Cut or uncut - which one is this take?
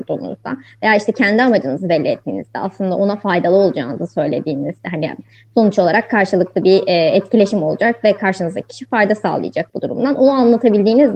uncut